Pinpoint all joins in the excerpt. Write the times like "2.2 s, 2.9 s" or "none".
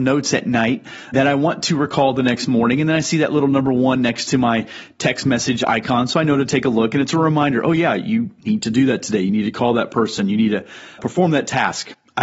1.1 s, 11.0 s